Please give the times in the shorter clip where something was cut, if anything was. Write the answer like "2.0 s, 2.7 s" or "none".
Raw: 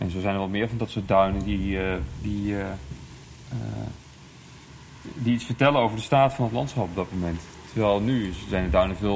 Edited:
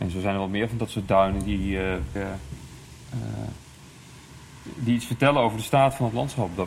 2.1 s